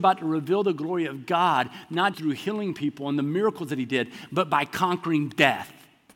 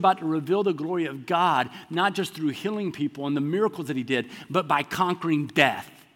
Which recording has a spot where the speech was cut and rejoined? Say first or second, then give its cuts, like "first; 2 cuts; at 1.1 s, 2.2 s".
first; 1 cut; at 2.1 s